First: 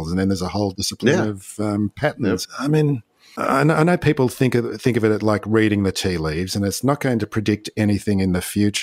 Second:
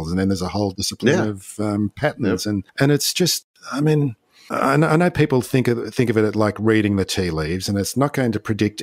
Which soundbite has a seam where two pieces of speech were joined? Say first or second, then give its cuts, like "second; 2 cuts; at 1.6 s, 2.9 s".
first; 1 cut; at 2.4 s